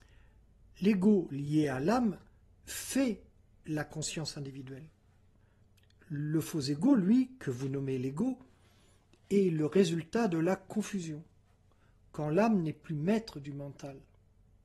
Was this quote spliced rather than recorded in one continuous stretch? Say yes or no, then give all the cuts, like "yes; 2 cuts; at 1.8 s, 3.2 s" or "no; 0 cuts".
no; 0 cuts